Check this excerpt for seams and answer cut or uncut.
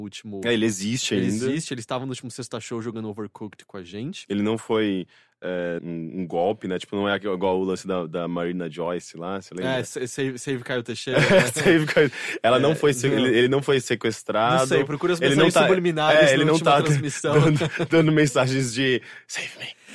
cut